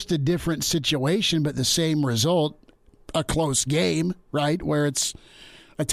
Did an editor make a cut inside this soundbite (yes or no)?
no